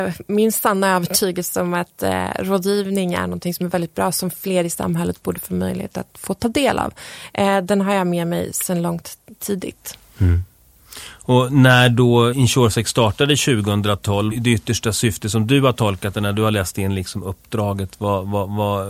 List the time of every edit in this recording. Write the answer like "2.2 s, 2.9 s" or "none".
12.3 s, 14.3 s